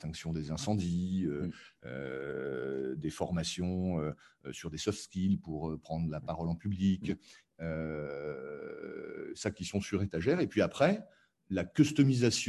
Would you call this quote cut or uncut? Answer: uncut